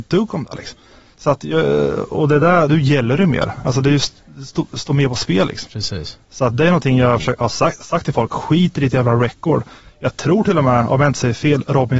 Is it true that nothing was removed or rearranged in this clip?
no; 1 cut; at 2.7 s

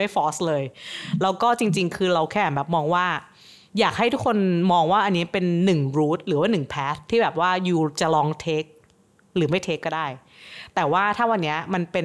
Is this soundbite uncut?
yes; 0 cuts

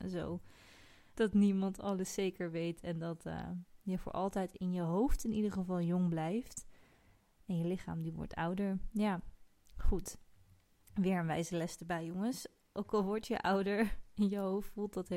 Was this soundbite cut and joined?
yes; 1 cut; at 1.1 s

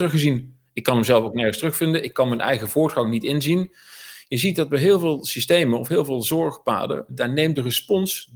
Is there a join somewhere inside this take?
yes; 1 cut; at 7.1 s

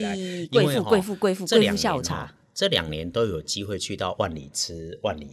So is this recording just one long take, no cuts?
yes; 0 cuts

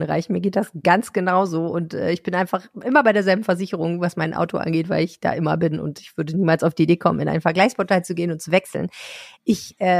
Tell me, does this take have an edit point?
no; 0 cuts

